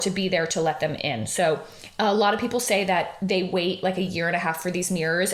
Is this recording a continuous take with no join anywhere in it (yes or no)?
yes